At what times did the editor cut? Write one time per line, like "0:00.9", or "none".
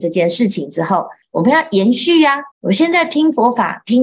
0:01.2
0:02.5